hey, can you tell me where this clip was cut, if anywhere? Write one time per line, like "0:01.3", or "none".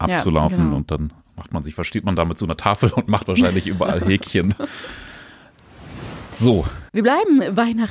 0:06.9